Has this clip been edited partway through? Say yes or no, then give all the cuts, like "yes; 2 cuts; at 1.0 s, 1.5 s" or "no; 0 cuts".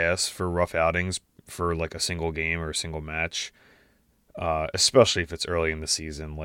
no; 0 cuts